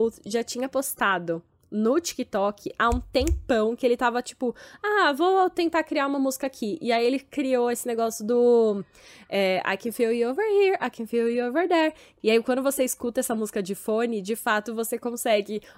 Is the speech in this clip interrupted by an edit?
yes; 1 cut; at 12.2 s

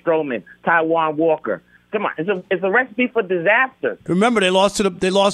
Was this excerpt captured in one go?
no; 2 cuts; at 1.8 s, 4.1 s

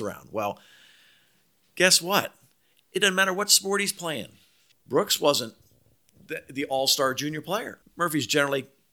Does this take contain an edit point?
yes; 2 cuts; at 4.7 s, 7.8 s

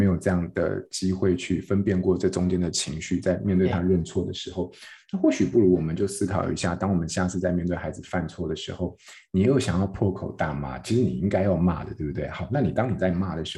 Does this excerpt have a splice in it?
no; 0 cuts

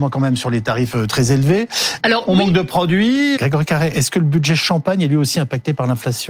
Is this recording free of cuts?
no; 2 cuts; at 2.0 s, 3.4 s

